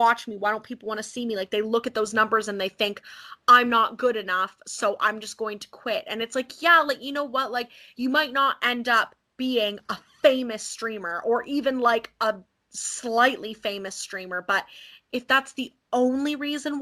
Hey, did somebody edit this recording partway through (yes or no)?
no